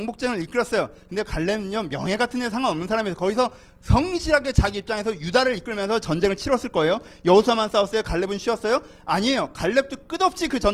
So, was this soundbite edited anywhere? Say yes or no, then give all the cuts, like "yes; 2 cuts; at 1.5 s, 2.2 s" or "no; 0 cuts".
no; 0 cuts